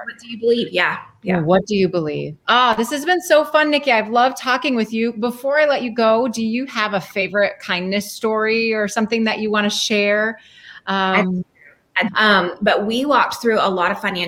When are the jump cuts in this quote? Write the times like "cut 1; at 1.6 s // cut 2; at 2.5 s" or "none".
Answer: cut 1; at 12.1 s